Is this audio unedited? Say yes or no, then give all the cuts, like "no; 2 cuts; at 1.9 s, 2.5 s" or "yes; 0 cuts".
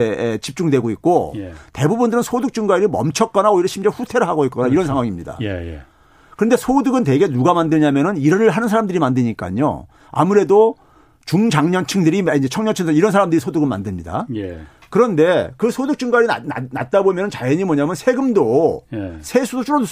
yes; 0 cuts